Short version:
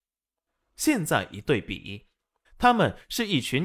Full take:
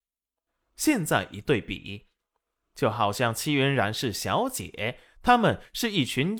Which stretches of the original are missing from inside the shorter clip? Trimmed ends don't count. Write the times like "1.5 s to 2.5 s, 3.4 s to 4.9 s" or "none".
2.4 s to 5.1 s